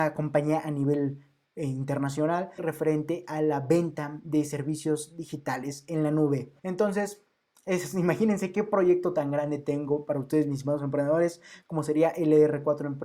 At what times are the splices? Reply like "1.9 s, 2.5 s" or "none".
2.6 s, 6.6 s